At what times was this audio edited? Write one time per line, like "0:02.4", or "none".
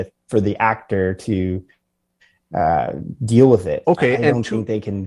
0:03.8